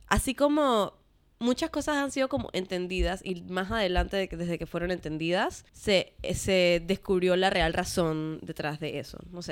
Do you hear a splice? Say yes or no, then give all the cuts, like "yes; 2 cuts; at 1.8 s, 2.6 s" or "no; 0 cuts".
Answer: yes; 1 cut; at 5.7 s